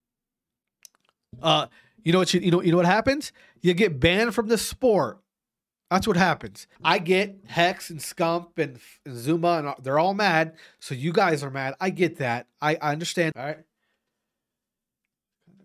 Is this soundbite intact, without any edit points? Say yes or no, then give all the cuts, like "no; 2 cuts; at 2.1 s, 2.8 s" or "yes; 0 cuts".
no; 2 cuts; at 6.8 s, 13.3 s